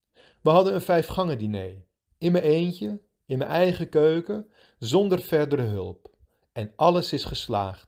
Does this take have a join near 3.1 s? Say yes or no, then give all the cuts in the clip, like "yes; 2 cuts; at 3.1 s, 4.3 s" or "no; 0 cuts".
no; 0 cuts